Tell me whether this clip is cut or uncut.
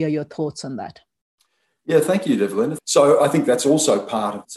cut